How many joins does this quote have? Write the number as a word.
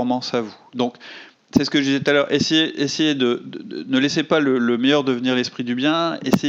zero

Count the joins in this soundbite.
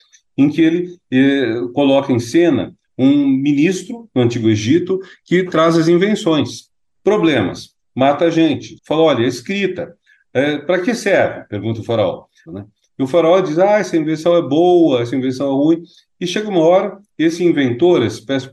three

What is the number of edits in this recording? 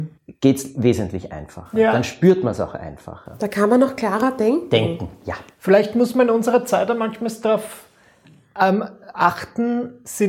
zero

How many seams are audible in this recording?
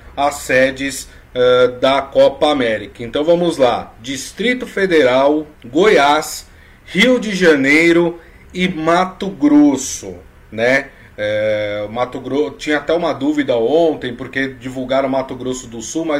one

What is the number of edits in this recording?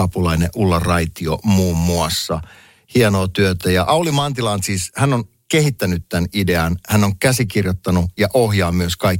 zero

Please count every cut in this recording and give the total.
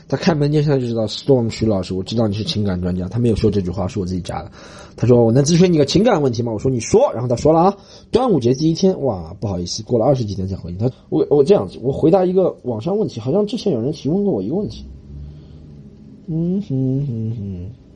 one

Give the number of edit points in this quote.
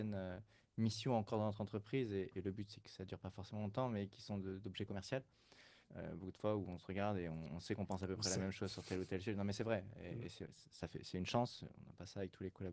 one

